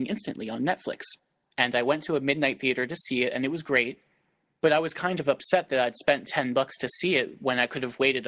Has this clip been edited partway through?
yes; 1 cut; at 1.5 s

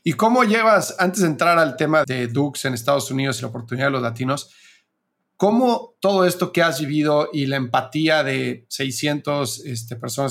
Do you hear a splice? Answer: yes; 1 cut; at 2.0 s

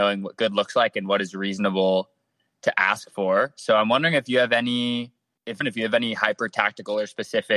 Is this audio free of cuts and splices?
no; 1 cut; at 5.6 s

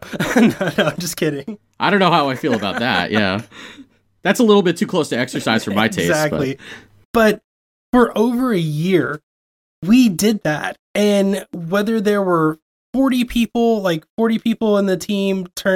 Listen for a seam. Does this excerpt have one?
no; 0 cuts

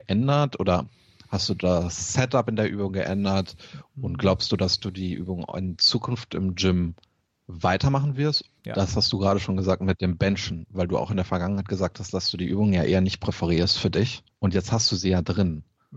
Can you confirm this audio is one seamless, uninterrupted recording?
no; 2 cuts; at 8.6 s, 14.3 s

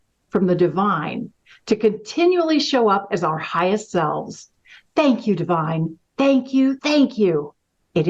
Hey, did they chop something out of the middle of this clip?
yes; 1 cut; at 6.8 s

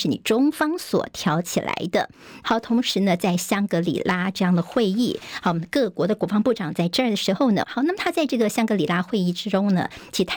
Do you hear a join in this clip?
yes; 2 cuts; at 2.4 s, 7.6 s

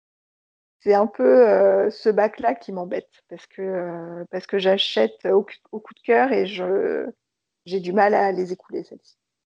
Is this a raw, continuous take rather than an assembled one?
yes; 0 cuts

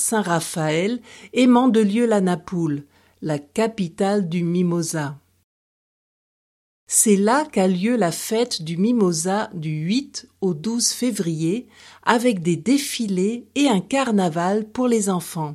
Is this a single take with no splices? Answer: yes; 0 cuts

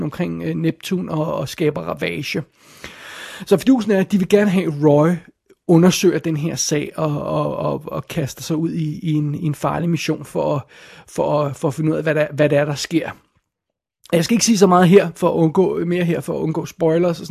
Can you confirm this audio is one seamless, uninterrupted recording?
yes; 0 cuts

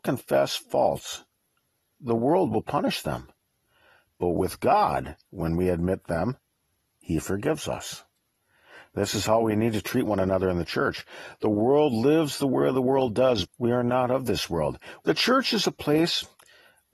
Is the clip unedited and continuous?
no; 2 cuts; at 13.4 s, 15.0 s

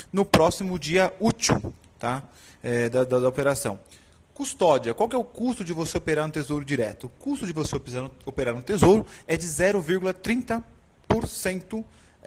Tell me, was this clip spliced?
no; 0 cuts

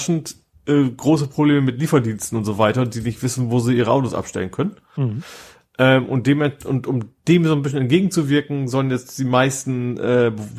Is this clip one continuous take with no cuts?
yes; 0 cuts

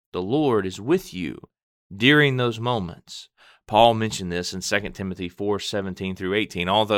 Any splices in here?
no; 0 cuts

